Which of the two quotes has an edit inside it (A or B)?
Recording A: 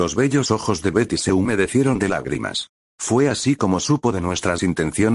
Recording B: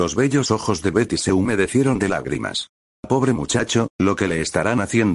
A